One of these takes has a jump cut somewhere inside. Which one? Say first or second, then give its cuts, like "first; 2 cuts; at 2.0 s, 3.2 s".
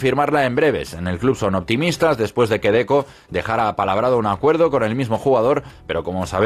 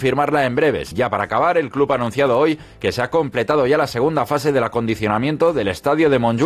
second; 1 cut; at 0.9 s